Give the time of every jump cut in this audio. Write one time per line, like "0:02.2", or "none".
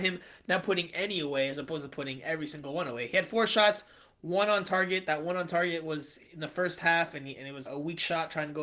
0:07.7